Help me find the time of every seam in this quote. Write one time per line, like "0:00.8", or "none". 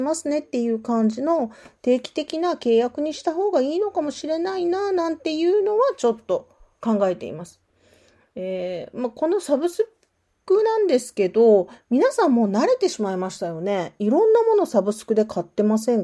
none

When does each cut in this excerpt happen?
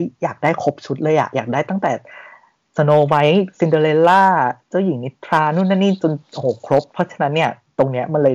0:06.9

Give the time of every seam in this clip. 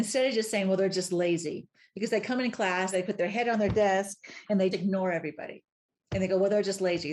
0:02.9
0:04.7

